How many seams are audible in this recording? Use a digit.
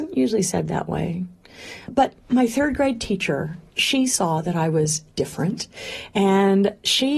1